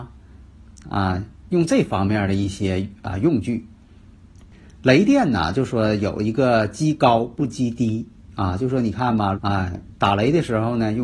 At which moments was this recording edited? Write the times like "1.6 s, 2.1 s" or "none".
9.3 s